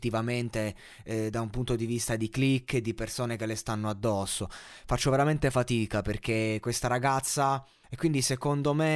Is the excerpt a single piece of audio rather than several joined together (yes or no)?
no